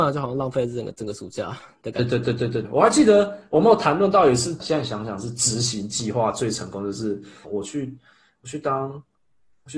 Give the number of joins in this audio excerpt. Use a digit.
3